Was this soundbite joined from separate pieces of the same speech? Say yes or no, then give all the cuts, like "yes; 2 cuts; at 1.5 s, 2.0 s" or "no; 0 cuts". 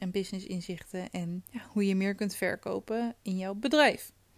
yes; 1 cut; at 1.5 s